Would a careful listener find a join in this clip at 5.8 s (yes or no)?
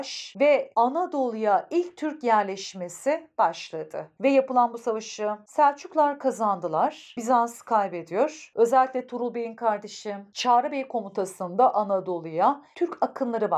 no